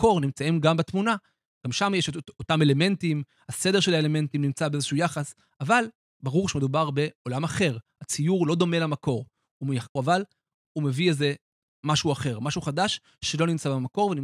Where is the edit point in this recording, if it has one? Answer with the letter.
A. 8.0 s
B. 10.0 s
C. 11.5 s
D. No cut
B